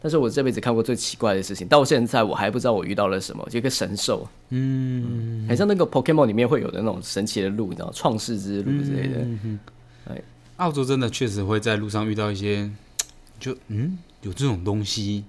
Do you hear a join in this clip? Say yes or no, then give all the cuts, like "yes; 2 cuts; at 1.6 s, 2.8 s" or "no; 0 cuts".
no; 0 cuts